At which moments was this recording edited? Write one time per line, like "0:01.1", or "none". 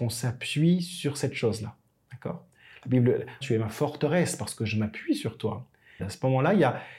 0:03.4
0:06.0